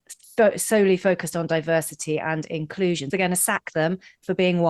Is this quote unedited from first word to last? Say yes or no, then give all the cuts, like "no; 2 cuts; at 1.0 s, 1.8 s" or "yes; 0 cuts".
no; 1 cut; at 3.1 s